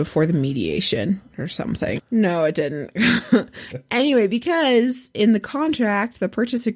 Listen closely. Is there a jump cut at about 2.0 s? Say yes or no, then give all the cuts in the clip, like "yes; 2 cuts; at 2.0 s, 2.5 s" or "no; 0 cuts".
yes; 2 cuts; at 2.0 s, 3.7 s